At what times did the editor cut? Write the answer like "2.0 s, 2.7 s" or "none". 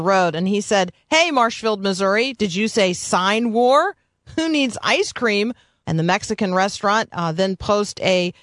5.8 s